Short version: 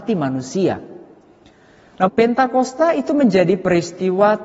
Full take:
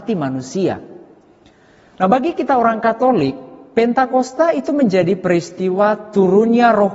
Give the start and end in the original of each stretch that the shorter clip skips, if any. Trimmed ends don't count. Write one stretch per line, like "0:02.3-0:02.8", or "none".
0:02.1-0:03.7